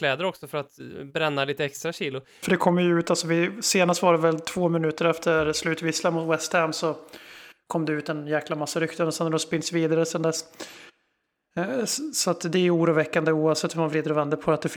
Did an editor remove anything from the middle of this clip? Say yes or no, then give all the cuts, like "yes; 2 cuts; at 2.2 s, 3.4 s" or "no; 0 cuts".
yes; 1 cut; at 2.4 s